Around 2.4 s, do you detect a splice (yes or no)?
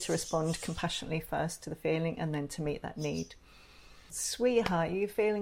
no